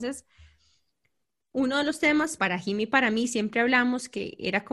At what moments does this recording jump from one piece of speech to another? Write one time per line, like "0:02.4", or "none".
0:02.4